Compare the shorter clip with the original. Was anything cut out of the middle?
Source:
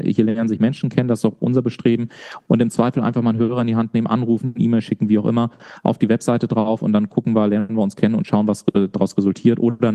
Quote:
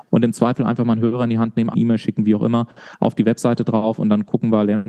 yes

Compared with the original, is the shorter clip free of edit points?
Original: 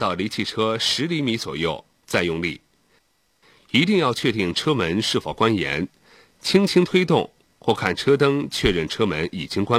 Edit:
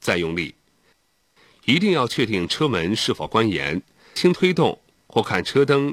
no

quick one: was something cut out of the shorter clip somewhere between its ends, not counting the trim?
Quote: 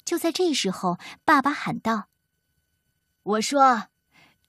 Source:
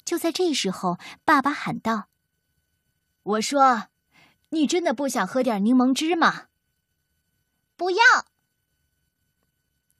no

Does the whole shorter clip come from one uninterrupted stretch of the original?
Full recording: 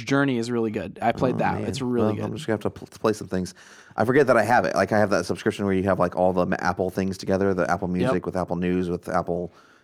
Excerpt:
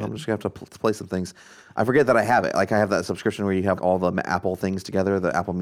no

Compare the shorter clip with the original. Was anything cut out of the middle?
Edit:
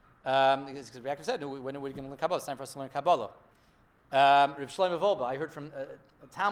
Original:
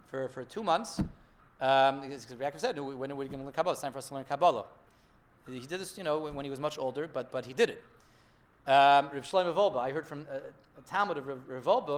yes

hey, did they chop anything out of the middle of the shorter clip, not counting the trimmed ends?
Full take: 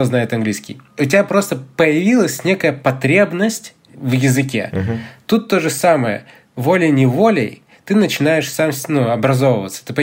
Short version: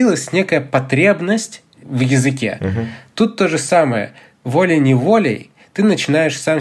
no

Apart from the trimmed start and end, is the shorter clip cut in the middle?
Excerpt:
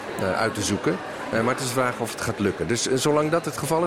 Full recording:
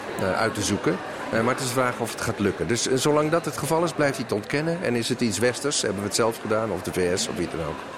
no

